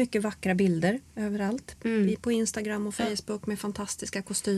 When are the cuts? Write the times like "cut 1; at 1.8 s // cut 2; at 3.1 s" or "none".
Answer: none